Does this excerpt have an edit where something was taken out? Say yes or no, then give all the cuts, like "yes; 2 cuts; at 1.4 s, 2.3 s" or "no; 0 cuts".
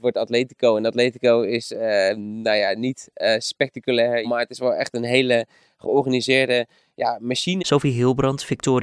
yes; 2 cuts; at 4.2 s, 7.6 s